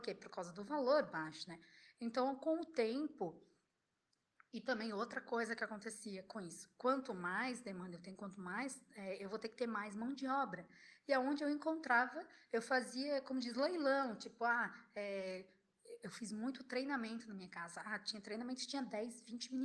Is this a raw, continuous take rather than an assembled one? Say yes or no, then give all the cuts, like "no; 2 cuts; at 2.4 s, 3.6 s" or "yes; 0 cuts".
yes; 0 cuts